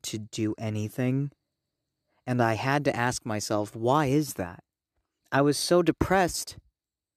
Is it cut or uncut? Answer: cut